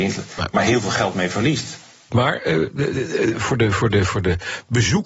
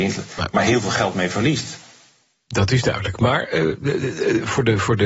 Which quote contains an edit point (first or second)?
first